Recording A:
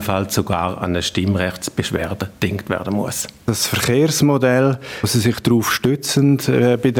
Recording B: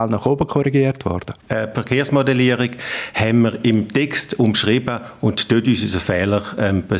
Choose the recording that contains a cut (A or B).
B